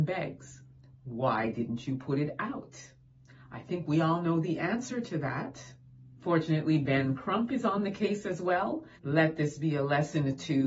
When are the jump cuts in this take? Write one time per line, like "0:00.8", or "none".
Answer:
0:06.2
0:08.9